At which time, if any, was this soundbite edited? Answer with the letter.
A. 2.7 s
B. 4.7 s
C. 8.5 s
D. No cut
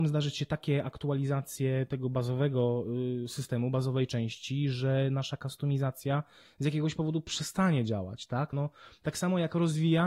C